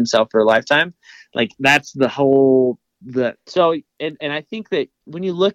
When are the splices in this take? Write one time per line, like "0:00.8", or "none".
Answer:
0:03.3